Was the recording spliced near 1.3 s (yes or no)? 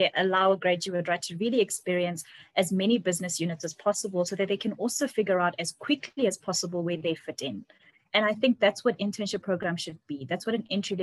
no